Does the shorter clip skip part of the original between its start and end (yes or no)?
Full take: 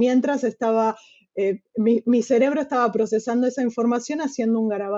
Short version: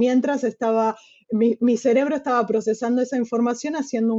yes